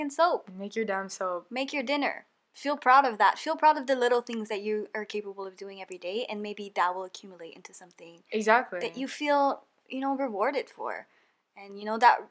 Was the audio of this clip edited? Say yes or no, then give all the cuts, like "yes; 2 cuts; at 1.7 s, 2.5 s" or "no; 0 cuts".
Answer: no; 0 cuts